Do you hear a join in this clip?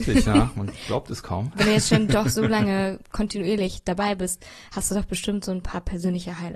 no; 0 cuts

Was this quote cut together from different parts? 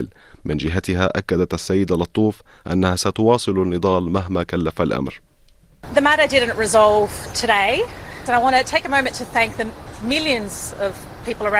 yes; 1 cut; at 8.3 s

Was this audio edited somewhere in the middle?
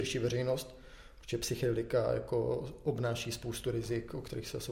no; 0 cuts

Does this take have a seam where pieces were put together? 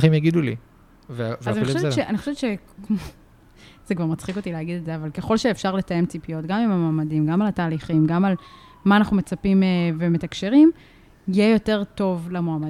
no; 0 cuts

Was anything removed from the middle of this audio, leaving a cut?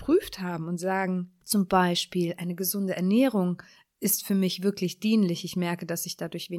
no; 0 cuts

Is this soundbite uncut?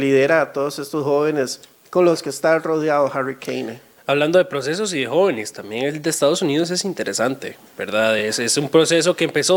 yes; 0 cuts

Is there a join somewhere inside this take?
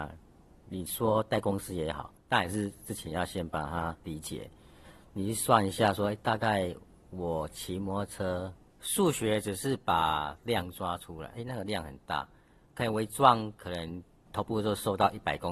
yes; 2 cuts; at 8.7 s, 11.3 s

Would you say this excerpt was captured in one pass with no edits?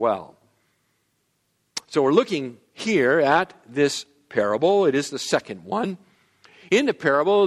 yes; 0 cuts

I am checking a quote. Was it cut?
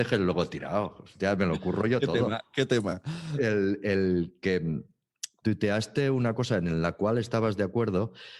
no; 0 cuts

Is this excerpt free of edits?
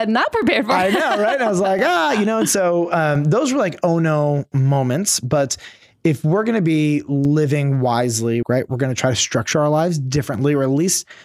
no; 1 cut; at 8.4 s

